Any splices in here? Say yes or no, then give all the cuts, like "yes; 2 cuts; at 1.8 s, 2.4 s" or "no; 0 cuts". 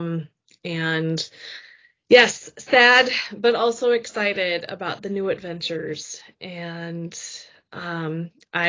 no; 0 cuts